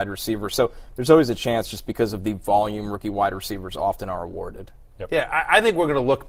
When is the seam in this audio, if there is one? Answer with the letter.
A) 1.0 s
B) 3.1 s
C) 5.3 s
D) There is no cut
D